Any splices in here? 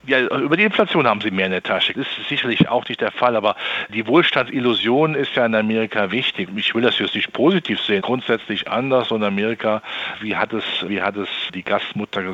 yes; 3 cuts; at 1.9 s, 6.5 s, 8.0 s

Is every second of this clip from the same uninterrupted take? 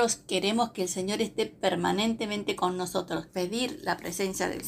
no; 1 cut; at 3.3 s

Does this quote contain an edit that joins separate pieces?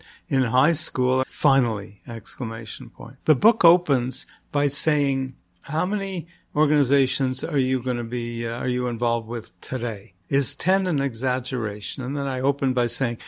yes; 1 cut; at 1.2 s

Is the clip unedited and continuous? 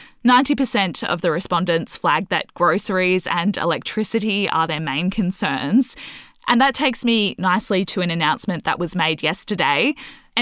yes; 0 cuts

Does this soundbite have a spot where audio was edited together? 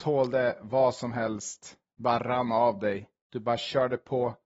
no; 0 cuts

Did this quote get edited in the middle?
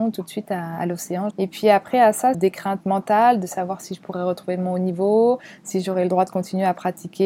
yes; 2 cuts; at 1.3 s, 2.3 s

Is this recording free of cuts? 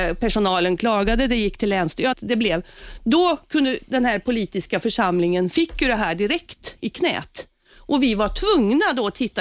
no; 1 cut; at 2.1 s

